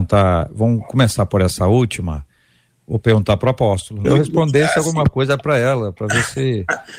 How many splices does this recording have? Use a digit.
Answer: 1